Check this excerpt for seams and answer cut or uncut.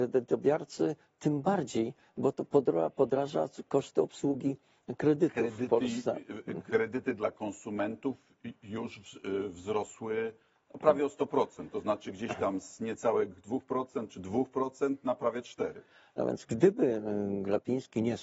uncut